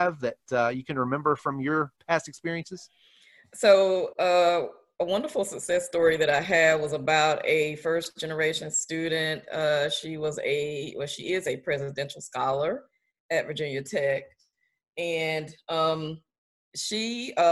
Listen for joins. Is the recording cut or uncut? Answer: uncut